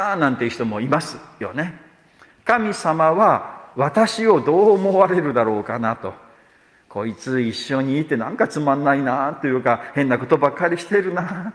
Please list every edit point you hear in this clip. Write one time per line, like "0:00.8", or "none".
none